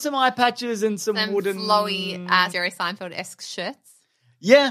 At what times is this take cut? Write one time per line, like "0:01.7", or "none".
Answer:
0:02.5